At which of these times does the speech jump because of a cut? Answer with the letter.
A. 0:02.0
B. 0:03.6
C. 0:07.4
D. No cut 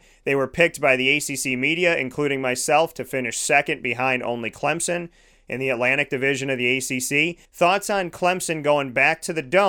C